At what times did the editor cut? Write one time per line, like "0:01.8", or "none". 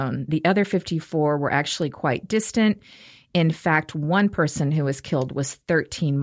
none